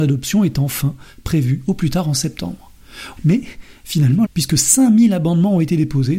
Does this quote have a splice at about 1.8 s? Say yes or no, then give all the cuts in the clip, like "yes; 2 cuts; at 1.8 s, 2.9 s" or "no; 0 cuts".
no; 2 cuts; at 3.2 s, 4.2 s